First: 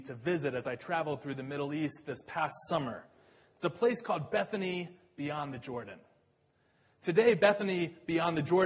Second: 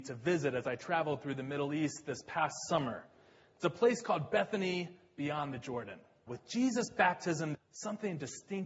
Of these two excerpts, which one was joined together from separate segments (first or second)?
second